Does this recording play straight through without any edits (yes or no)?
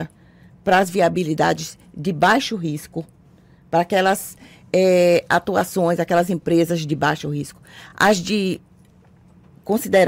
yes